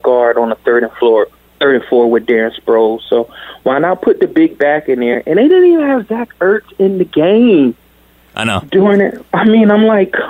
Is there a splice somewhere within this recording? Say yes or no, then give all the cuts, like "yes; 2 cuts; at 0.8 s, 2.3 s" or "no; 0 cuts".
no; 0 cuts